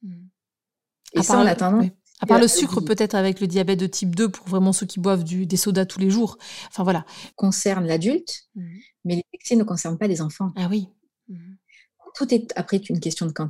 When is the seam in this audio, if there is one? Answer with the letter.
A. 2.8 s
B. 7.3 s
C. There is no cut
B